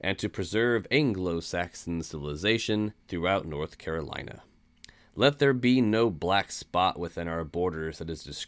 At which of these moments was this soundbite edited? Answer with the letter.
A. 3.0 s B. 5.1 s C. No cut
A